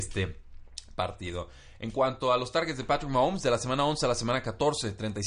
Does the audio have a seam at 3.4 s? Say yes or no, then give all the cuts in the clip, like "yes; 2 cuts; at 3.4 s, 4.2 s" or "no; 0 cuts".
no; 0 cuts